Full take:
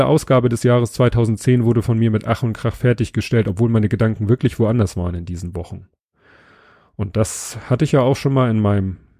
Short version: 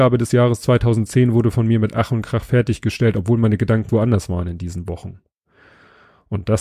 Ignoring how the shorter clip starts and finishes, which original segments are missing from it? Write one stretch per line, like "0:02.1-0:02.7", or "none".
0:04.2-0:04.6